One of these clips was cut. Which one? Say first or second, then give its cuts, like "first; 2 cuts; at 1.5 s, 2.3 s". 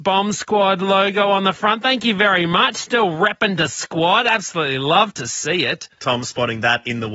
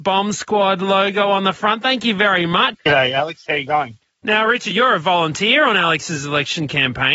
second; 2 cuts; at 2.7 s, 4.7 s